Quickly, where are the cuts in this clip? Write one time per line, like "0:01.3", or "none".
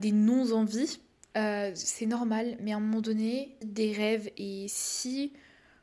0:01.3
0:03.6